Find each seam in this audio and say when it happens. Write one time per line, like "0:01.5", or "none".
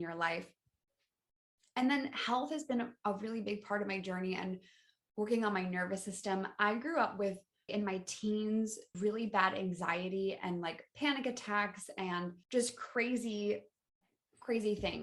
0:07.7
0:08.9
0:12.4